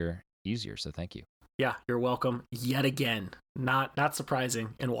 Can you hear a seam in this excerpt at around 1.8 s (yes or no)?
yes